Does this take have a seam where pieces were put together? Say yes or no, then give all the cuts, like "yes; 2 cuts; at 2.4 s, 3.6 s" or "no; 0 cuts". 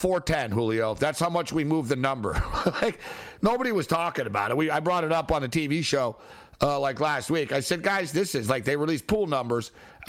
no; 0 cuts